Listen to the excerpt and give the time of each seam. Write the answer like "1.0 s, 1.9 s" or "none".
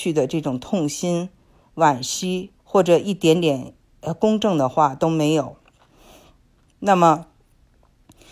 2.6 s